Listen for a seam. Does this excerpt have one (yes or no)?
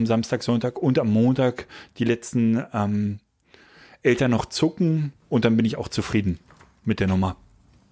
no